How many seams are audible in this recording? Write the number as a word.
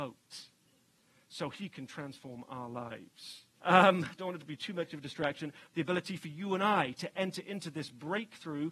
two